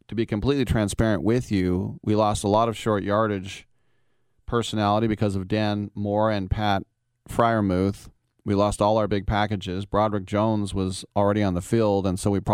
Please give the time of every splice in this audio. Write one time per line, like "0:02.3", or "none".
none